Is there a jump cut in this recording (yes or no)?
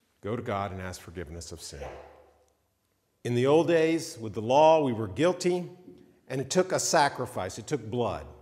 yes